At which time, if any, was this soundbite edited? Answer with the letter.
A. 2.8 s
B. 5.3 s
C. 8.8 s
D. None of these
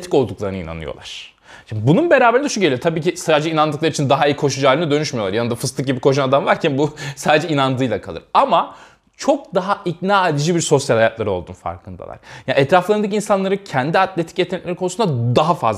D